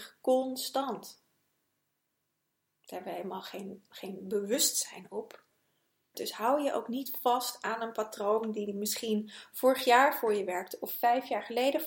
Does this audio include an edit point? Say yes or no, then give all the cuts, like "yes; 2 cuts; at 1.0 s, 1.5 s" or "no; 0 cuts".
yes; 1 cut; at 6.1 s